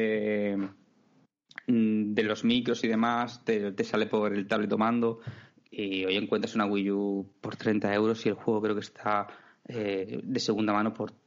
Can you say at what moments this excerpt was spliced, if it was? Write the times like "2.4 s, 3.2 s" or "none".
none